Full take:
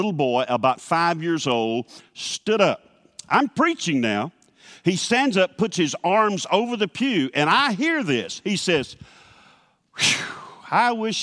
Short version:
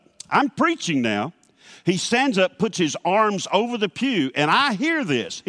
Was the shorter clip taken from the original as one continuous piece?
yes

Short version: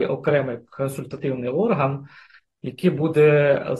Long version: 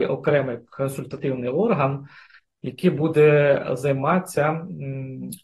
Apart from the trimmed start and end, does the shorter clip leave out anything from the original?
no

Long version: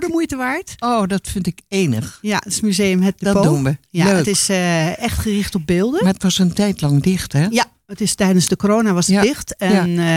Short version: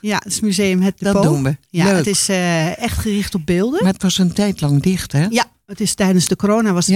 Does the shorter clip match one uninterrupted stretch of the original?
yes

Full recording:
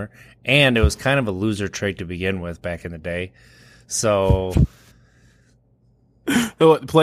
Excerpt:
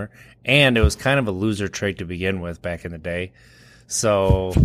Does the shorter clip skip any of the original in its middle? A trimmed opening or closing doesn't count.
no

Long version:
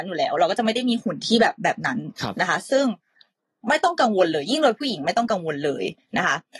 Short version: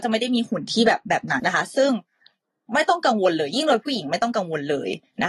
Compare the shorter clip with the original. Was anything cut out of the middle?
yes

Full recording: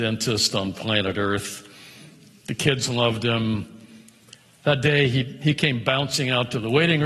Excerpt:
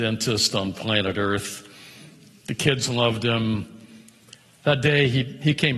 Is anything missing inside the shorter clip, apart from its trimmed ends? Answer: no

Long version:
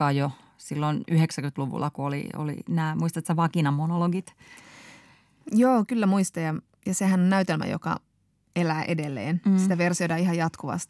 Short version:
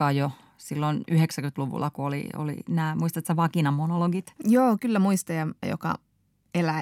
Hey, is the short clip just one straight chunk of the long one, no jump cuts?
no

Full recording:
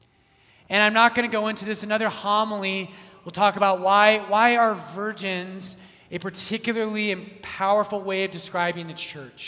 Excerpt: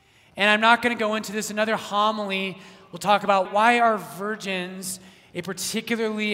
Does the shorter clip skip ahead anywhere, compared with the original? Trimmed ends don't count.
yes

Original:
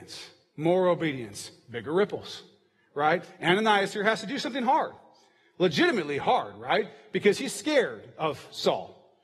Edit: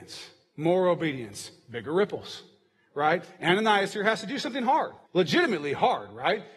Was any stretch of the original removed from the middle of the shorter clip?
yes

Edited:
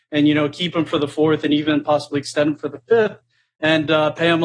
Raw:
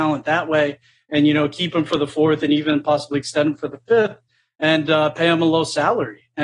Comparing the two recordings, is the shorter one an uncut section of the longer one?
yes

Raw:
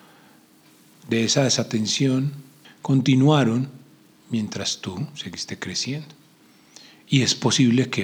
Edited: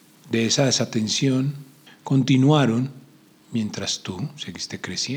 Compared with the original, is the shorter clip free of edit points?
yes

